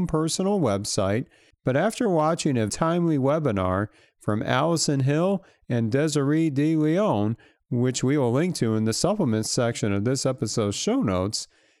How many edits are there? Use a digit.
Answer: 2